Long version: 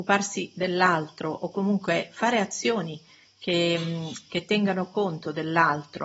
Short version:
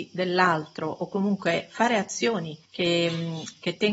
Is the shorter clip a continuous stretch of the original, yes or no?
no